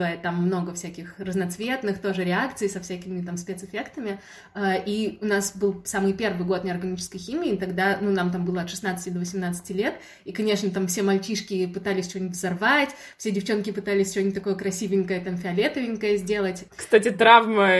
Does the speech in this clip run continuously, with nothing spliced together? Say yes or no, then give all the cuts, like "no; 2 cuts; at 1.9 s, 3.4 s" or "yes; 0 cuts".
no; 1 cut; at 16.7 s